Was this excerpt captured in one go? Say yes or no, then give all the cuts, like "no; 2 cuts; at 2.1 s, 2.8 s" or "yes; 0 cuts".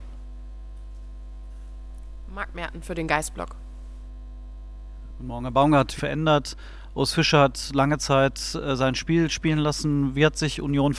no; 1 cut; at 6.0 s